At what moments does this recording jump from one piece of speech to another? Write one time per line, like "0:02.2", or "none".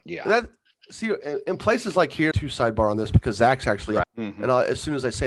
0:02.3
0:04.0

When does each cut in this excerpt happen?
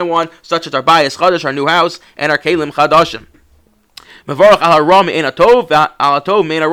none

